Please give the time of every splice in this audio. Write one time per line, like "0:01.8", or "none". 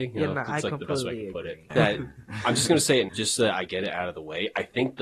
0:01.7
0:03.1